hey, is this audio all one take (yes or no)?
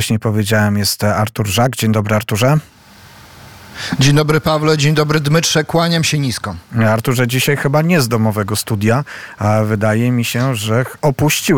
yes